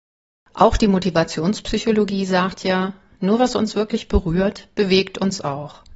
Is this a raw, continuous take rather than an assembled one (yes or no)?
yes